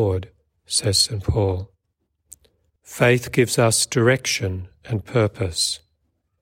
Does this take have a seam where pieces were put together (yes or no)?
yes